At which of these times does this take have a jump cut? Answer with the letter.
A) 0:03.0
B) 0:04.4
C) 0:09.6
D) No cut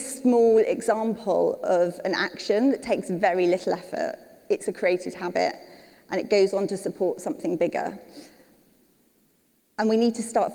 D